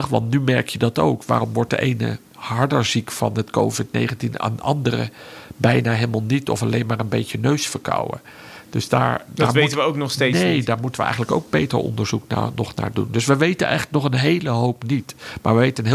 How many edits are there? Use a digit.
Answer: 0